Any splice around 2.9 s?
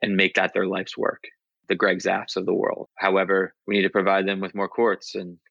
yes; 1 cut; at 2.9 s

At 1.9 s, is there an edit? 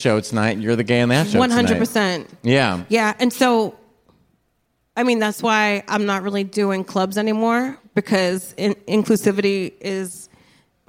no; 0 cuts

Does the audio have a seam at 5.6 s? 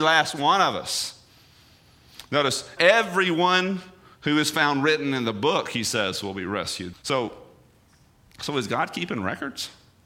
no; 2 cuts; at 2.8 s, 6.9 s

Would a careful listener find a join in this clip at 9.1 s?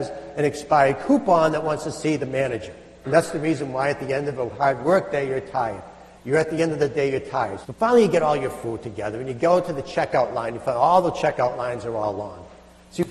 no; 3 cuts; at 3.0 s, 6.1 s, 7.6 s

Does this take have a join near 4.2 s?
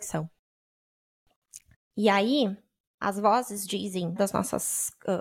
yes; 2 cuts; at 1.8 s, 4.2 s

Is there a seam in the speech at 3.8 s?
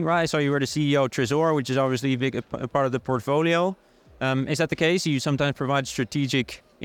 no; 0 cuts

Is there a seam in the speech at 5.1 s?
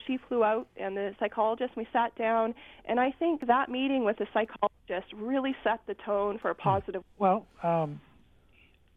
no; 1 cut; at 7.0 s

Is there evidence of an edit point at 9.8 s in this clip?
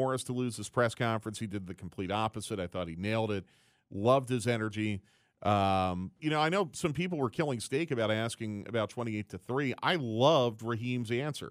no; 1 cut; at 6.2 s

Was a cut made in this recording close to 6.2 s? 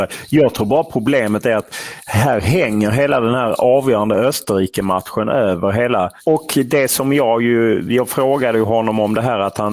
yes; 1 cut; at 6.2 s

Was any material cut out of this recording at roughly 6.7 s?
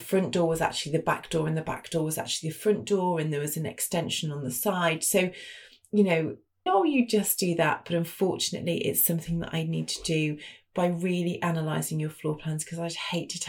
yes; 1 cut; at 6.7 s

